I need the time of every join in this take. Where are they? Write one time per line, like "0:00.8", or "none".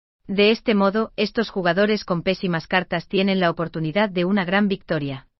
none